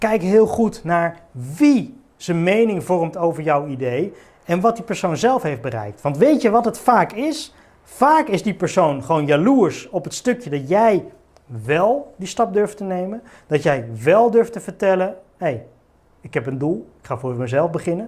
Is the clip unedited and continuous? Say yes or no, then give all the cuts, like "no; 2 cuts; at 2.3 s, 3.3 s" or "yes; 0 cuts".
yes; 0 cuts